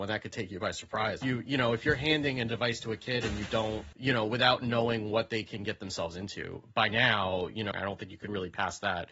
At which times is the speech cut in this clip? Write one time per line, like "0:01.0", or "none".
0:01.2
0:03.9
0:07.7